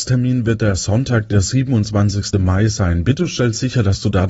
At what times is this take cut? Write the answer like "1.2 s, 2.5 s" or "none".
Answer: none